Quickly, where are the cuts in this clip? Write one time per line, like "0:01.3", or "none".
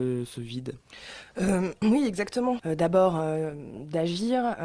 0:02.6